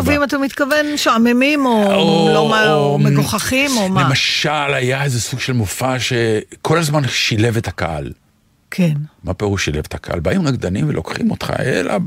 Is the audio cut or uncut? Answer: uncut